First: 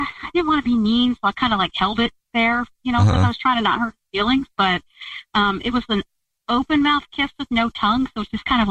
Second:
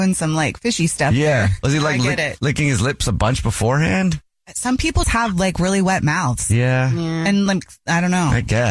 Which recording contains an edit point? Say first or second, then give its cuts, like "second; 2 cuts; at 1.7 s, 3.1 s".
second; 1 cut; at 5.0 s